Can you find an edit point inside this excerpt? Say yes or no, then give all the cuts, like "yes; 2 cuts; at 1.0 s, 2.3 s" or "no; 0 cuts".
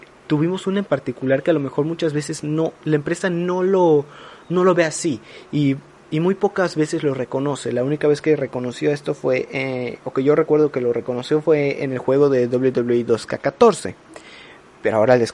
yes; 1 cut; at 2.8 s